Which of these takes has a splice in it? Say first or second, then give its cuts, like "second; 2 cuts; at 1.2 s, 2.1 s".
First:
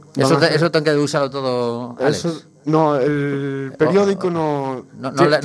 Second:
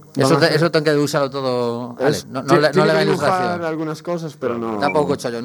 second; 1 cut; at 2.2 s